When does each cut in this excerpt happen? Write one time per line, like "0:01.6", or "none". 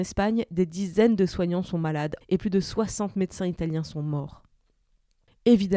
0:02.2